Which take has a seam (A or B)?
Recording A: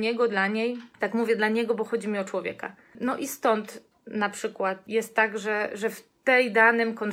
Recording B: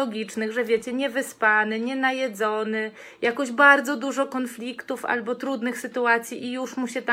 A